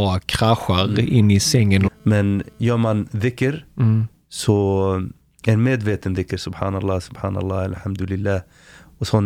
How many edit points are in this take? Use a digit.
1